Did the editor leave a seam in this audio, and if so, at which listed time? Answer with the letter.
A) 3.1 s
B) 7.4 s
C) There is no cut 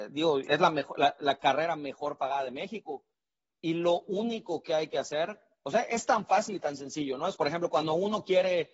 B